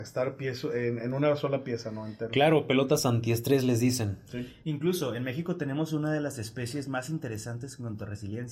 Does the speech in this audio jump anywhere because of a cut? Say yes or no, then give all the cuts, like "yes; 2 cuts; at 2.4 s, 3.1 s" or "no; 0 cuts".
no; 0 cuts